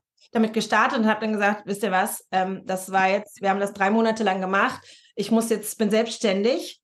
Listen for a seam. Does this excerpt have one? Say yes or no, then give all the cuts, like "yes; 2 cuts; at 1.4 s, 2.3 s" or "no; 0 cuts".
no; 0 cuts